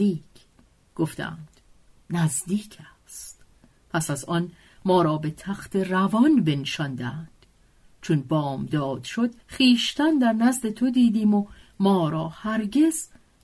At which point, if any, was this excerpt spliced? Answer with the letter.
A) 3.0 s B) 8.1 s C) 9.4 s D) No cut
C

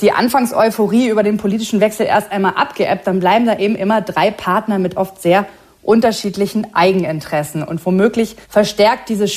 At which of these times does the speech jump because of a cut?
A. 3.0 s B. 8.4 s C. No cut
B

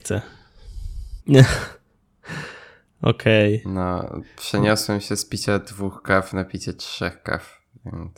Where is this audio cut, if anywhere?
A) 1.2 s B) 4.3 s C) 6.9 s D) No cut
A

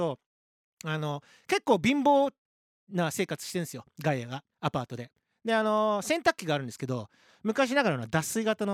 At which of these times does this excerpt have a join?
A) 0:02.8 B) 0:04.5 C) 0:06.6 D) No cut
B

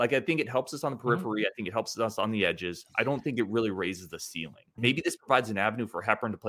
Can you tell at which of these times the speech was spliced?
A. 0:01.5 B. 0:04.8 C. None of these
B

